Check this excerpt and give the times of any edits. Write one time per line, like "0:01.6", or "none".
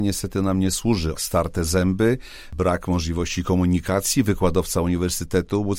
0:01.1